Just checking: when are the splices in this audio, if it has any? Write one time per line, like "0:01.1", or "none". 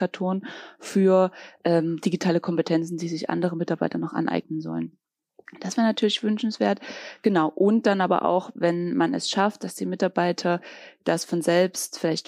none